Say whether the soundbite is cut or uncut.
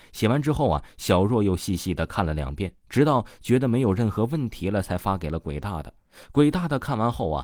uncut